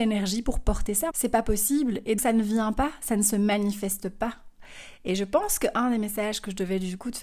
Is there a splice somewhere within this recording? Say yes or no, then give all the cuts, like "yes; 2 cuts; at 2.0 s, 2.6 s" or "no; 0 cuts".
yes; 2 cuts; at 1.1 s, 2.2 s